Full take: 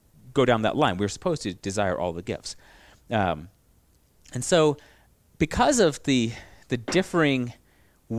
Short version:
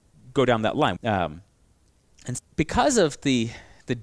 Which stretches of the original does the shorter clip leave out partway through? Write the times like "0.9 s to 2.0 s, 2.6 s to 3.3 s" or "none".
1.0 s to 3.0 s, 4.5 s to 5.2 s